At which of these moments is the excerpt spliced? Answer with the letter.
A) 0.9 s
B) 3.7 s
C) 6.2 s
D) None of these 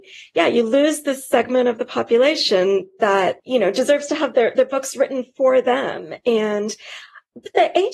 D